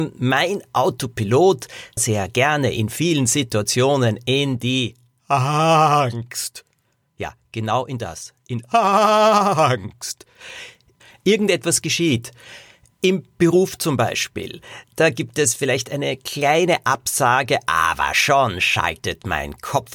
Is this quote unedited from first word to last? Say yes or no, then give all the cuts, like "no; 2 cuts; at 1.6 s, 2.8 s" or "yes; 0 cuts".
no; 1 cut; at 2.0 s